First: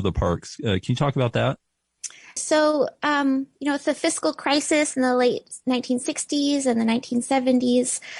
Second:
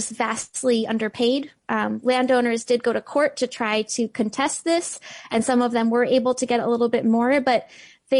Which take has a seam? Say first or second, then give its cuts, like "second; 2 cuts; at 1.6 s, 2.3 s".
first; 1 cut; at 2.4 s